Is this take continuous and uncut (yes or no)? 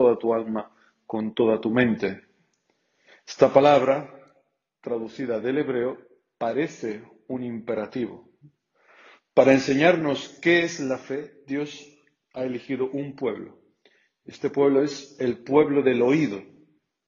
no